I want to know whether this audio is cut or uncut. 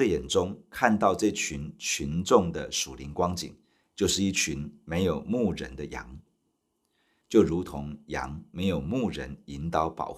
cut